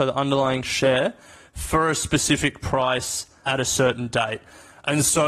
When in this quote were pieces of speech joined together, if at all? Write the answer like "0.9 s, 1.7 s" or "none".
none